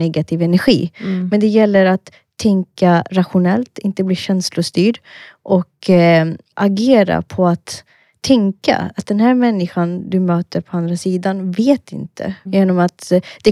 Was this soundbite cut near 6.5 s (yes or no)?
yes